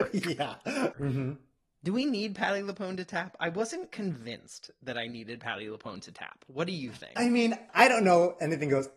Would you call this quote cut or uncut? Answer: cut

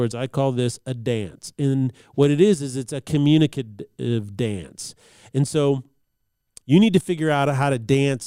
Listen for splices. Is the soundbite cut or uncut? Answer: cut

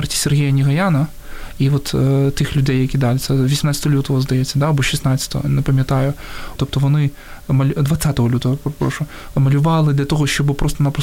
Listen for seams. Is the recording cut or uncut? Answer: cut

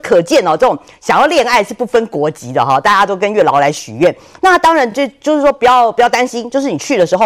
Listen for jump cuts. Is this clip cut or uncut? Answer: uncut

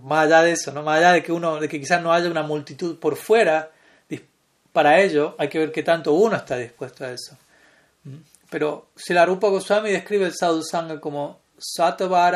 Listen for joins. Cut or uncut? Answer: uncut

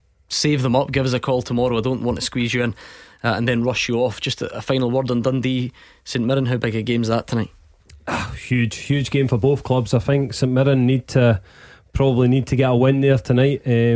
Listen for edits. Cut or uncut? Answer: uncut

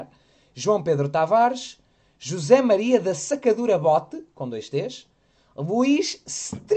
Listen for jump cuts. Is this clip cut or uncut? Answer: uncut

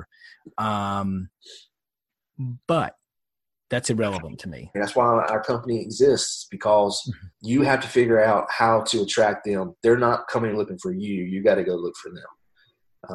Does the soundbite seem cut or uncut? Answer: cut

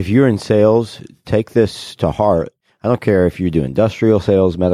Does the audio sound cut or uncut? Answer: uncut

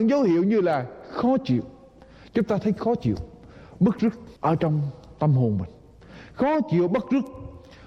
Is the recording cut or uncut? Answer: cut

